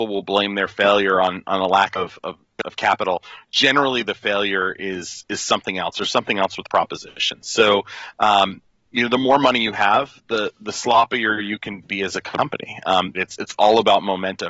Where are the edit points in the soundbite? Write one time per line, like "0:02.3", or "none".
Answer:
0:13.1

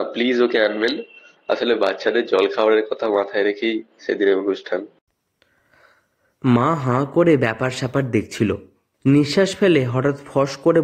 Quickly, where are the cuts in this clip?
none

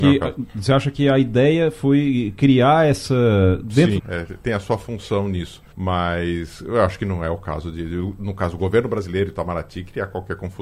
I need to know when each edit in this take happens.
0:04.0
0:05.7

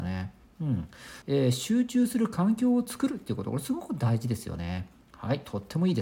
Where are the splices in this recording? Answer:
0:01.2

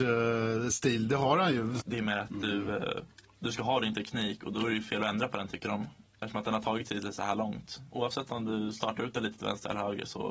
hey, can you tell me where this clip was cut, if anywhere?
0:01.8
0:07.9

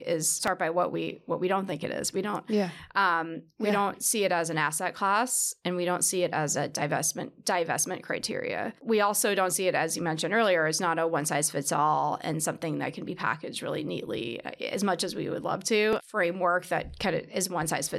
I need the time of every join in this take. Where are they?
none

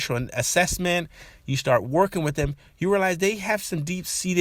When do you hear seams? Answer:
none

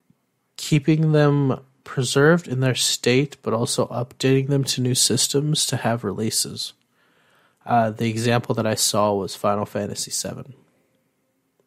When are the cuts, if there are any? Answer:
none

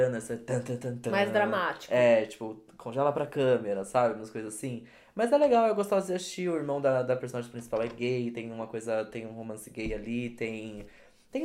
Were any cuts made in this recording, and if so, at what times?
none

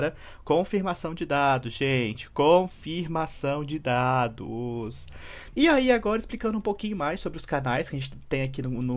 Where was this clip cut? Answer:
0:05.5

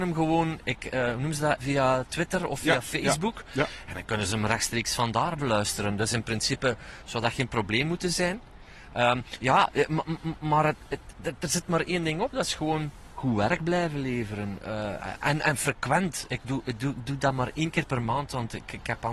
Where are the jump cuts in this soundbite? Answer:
0:01.6
0:08.9

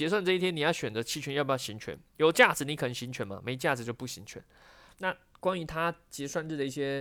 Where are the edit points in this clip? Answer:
0:04.9

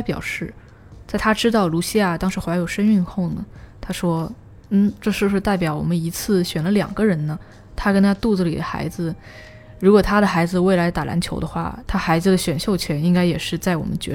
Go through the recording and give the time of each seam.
none

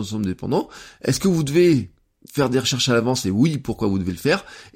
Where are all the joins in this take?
none

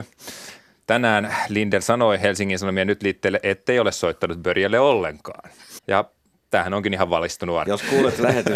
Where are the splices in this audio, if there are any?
0:05.8
0:07.7

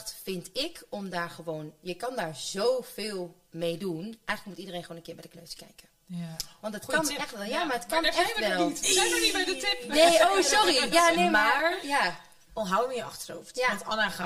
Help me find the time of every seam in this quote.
none

